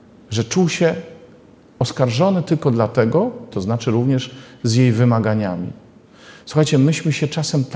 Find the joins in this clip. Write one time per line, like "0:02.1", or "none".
0:03.5

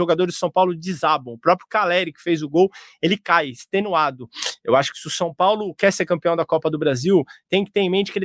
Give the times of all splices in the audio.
none

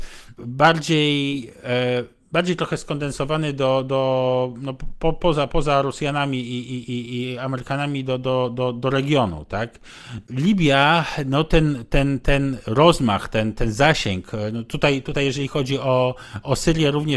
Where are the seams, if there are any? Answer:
none

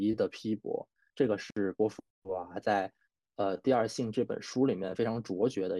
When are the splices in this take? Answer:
none

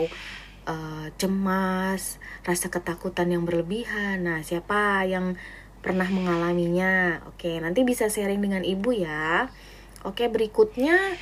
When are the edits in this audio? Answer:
none

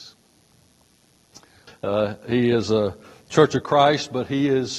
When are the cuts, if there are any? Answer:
0:01.7

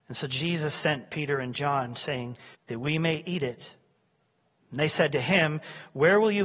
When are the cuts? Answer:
0:02.5

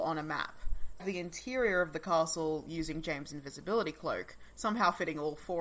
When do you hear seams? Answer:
0:01.0

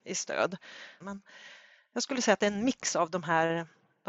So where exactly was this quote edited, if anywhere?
0:01.0

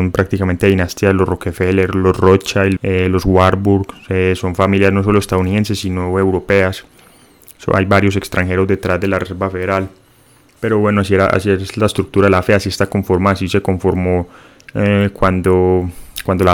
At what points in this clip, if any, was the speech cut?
0:02.8

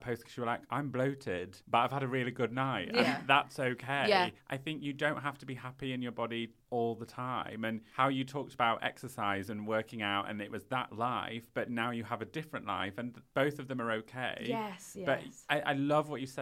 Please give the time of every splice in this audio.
none

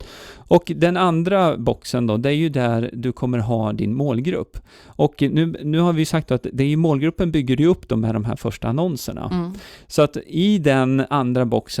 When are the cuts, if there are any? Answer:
none

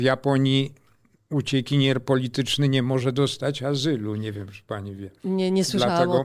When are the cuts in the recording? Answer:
none

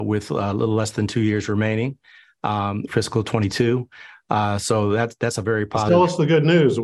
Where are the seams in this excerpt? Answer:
0:02.9

